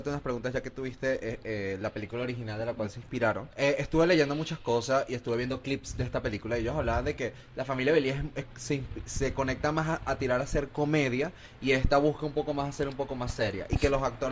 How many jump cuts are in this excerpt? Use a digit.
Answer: 1